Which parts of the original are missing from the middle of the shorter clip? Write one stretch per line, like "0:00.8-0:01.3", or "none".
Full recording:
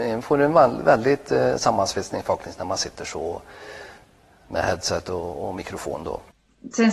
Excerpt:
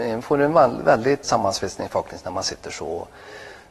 0:01.2-0:01.6